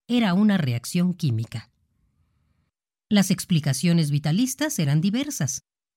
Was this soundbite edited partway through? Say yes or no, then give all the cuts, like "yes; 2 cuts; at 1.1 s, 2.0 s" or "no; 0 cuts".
no; 0 cuts